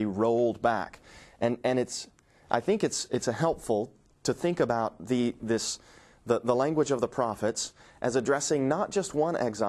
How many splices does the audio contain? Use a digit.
0